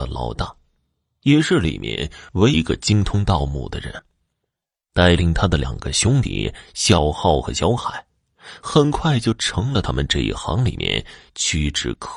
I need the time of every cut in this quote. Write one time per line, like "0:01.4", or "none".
0:02.5